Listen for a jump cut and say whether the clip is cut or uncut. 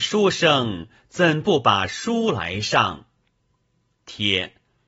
uncut